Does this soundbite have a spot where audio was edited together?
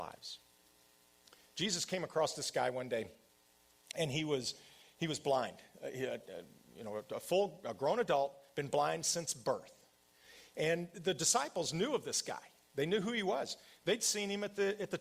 no; 0 cuts

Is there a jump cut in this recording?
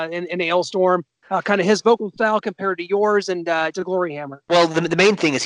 yes; 2 cuts; at 1.2 s, 3.7 s

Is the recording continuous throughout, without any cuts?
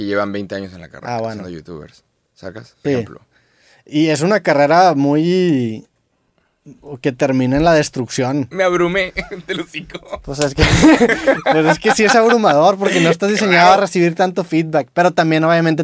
no; 2 cuts; at 2.8 s, 8.5 s

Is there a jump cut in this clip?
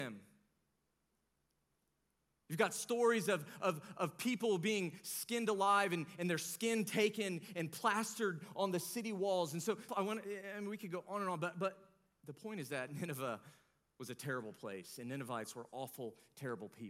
yes; 1 cut; at 9.9 s

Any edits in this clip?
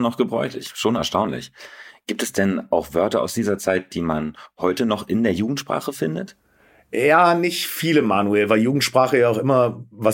no; 0 cuts

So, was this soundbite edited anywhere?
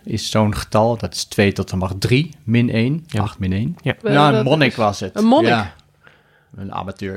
yes; 1 cut; at 4.0 s

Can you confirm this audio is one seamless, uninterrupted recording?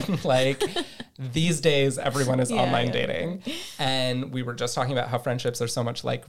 yes; 0 cuts

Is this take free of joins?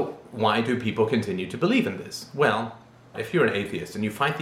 no; 1 cut; at 3.1 s

